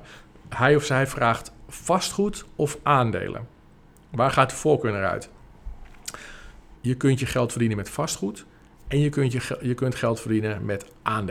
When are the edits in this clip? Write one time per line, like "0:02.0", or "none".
0:06.8